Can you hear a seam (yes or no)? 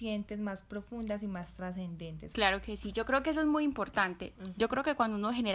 yes